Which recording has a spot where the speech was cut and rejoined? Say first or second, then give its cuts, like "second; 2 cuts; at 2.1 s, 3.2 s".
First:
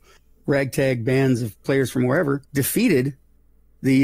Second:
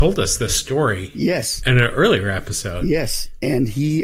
first; 1 cut; at 2.5 s